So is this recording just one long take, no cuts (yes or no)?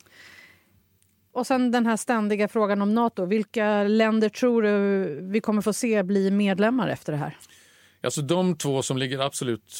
yes